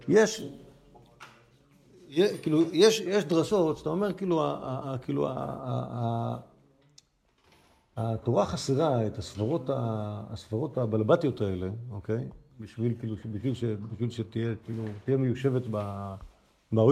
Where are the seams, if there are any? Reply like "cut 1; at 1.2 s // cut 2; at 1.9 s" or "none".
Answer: none